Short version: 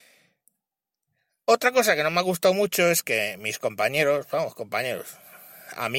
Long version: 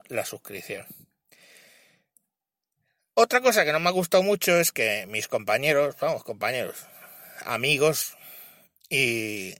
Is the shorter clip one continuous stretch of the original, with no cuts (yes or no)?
yes